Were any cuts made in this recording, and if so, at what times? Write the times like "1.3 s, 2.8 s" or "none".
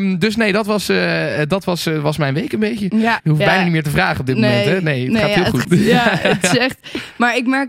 3.2 s, 5.6 s